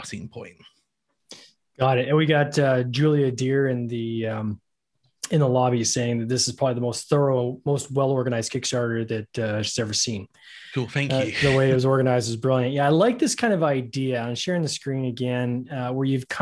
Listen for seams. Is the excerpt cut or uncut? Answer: uncut